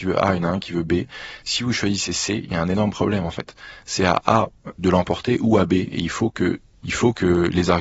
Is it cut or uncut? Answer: cut